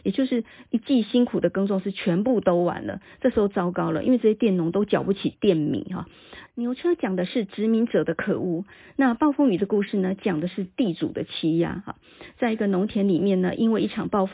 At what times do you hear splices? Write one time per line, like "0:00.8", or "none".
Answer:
0:06.5